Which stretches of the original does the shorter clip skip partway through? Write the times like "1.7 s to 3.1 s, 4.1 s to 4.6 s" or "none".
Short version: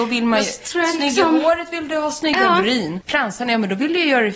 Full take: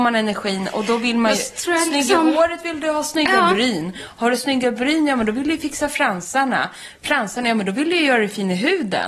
3.9 s to 7.0 s